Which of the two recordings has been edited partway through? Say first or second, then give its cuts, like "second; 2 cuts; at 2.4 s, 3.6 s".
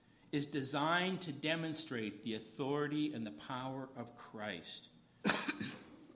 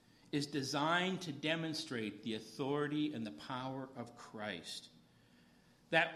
first; 1 cut; at 5.2 s